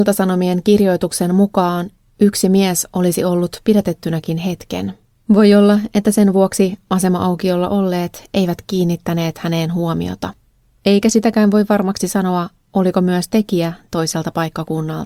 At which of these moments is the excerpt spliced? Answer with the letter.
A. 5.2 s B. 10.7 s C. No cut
A